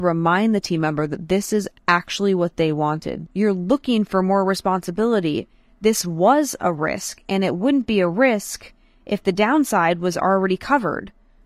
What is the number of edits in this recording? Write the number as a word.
one